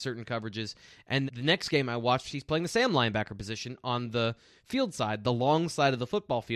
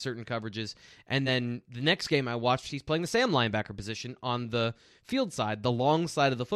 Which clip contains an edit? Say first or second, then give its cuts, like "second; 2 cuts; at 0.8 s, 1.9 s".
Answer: first; 1 cut; at 1.3 s